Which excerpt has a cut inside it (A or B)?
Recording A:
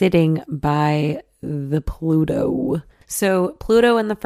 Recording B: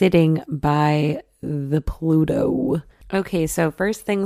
A